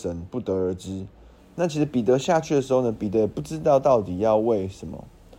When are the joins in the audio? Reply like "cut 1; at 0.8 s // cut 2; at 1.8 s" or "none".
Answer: cut 1; at 1.4 s

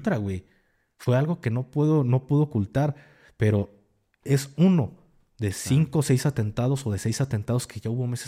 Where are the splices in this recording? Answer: none

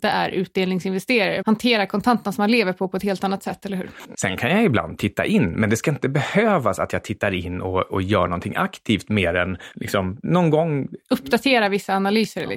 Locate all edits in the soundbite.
cut 1; at 1.4 s // cut 2; at 4.1 s

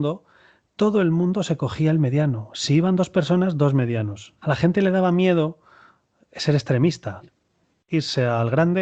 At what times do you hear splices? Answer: cut 1; at 4.4 s

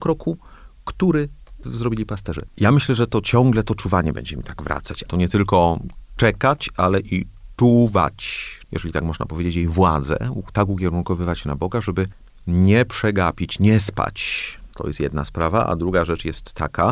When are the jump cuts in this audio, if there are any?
cut 1; at 2.5 s // cut 2; at 5.1 s // cut 3; at 8.6 s

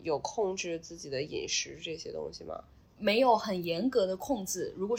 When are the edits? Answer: cut 1; at 2.9 s

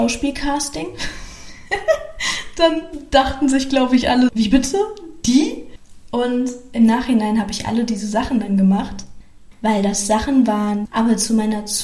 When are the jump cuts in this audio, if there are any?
cut 1; at 4.3 s // cut 2; at 9.5 s // cut 3; at 10.8 s

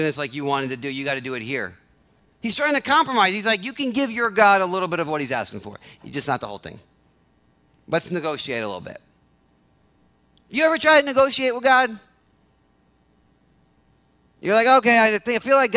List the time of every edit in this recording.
none

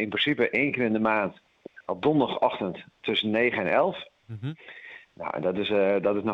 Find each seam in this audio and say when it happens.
none

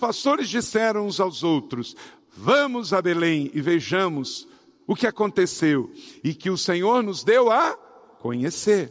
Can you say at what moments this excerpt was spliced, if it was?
none

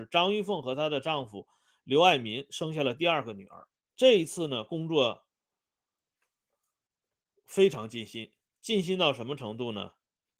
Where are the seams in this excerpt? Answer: cut 1; at 3.9 s

